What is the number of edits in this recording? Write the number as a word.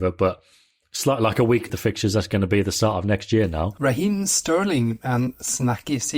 one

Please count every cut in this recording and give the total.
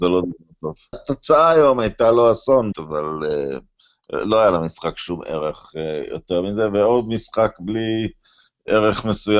two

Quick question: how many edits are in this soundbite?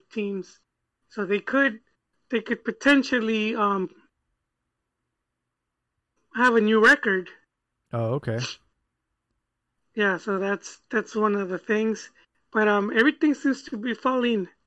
zero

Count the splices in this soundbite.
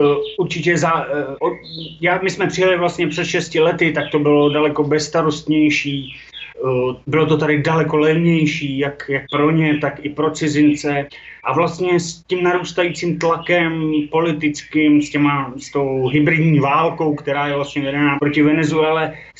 one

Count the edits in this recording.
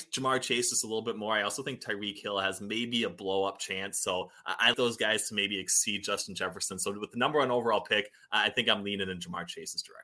one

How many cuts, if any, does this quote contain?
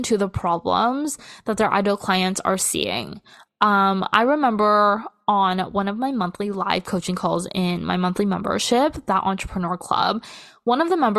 zero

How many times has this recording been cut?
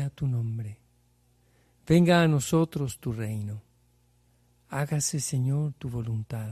zero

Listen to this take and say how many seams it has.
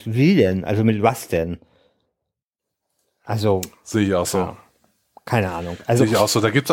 zero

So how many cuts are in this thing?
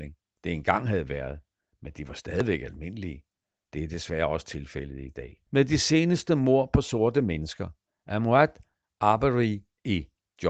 one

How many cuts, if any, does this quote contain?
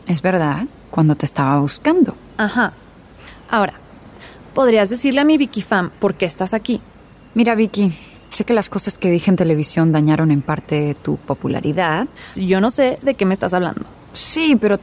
two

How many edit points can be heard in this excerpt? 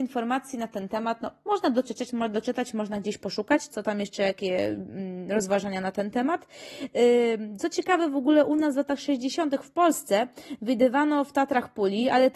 zero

